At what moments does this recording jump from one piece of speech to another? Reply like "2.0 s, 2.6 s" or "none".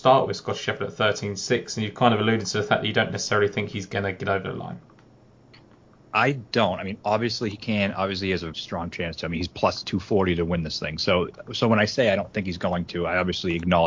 8.5 s, 11.4 s